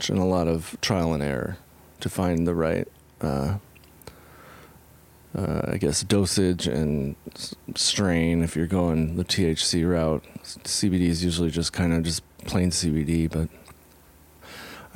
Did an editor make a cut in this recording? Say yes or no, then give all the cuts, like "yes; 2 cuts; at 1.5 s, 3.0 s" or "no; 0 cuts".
no; 0 cuts